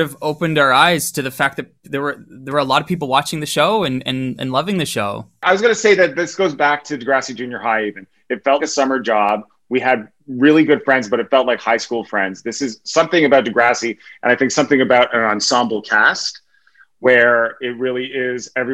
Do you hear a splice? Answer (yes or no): yes